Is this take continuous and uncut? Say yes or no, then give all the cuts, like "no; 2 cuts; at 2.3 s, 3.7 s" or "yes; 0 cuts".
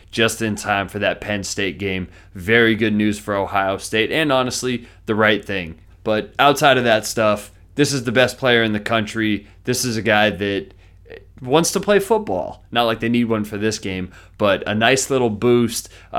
no; 2 cuts; at 5.9 s, 12.7 s